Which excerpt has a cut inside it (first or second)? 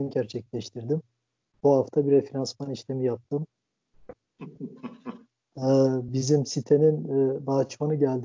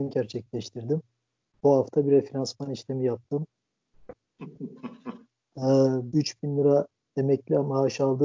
second